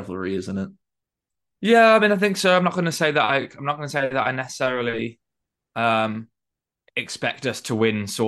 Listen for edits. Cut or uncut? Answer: uncut